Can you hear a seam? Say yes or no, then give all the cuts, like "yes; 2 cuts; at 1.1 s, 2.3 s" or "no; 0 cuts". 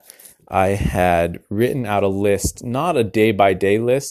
no; 0 cuts